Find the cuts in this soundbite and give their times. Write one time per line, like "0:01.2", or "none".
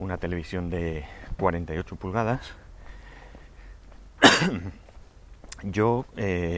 none